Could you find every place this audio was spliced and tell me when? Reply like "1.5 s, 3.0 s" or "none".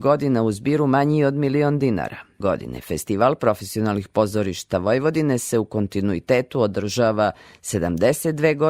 2.4 s